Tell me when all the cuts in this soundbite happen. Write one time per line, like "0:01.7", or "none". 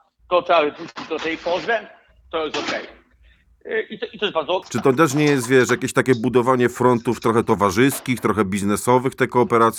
0:04.6